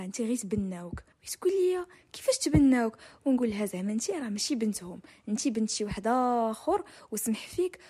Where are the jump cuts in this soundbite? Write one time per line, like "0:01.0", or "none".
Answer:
0:01.1